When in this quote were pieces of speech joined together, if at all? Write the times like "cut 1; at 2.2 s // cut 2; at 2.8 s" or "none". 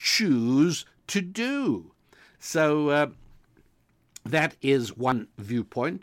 cut 1; at 2.3 s